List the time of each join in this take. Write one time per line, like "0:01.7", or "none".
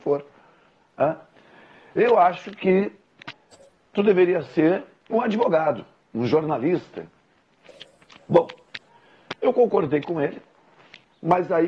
none